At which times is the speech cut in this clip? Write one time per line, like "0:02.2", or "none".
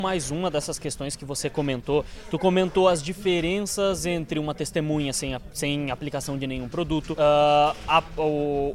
0:07.1